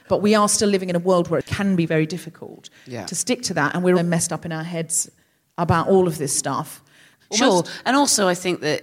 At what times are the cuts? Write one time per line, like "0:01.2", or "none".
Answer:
0:03.9
0:07.2